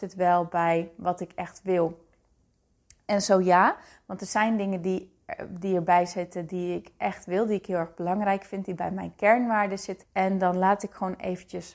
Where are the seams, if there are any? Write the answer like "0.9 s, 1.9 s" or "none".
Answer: 10.0 s